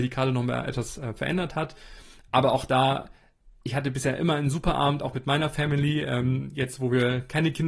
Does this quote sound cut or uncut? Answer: uncut